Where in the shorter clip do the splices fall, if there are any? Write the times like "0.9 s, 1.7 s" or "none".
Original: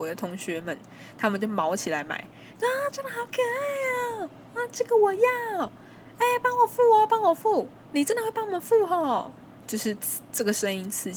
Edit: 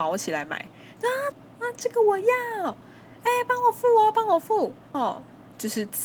1.3 s, 4.9 s